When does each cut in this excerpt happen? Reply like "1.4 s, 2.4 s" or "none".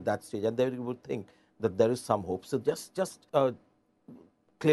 3.3 s

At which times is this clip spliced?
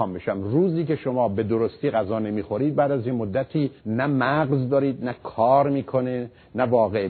3.8 s

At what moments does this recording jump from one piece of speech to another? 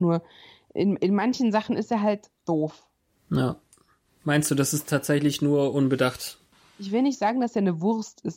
2.4 s

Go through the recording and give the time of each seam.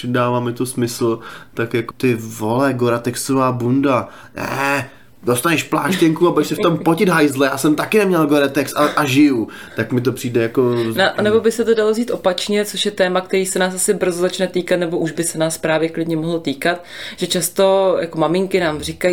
1.9 s

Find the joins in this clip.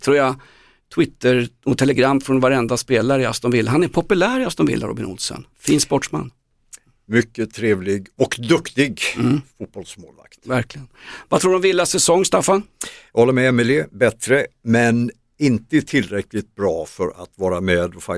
5.5 s

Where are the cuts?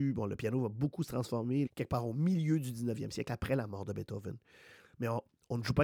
1.7 s

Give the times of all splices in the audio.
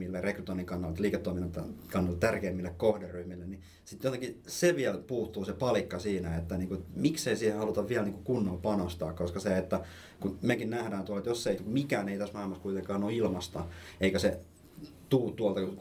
11.6 s

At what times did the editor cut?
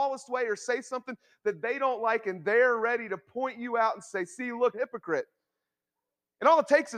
4.7 s

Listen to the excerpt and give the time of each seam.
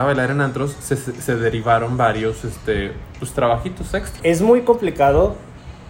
4.2 s

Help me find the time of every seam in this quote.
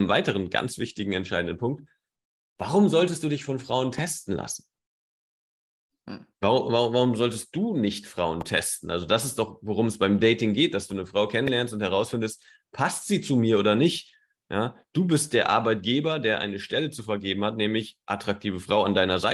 none

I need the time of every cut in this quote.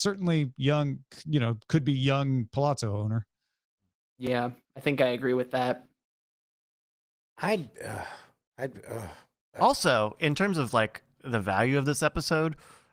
none

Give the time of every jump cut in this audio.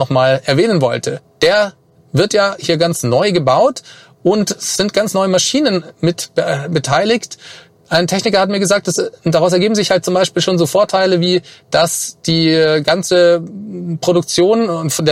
1.2 s

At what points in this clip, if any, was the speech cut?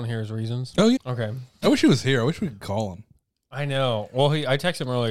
1.0 s

